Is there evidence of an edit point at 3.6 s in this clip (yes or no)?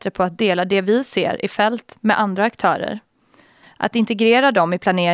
yes